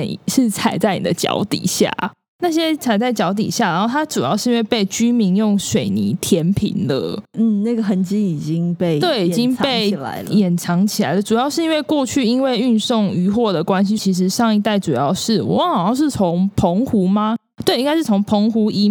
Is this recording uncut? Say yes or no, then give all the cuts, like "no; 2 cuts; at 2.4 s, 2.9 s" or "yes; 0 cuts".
no; 1 cut; at 14.0 s